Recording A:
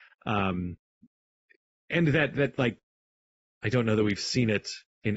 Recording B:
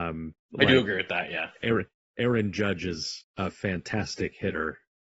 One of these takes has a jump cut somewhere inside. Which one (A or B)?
B